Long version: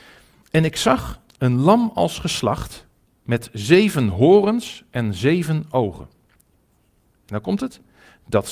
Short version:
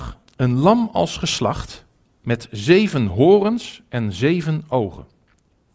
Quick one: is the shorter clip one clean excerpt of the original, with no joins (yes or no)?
yes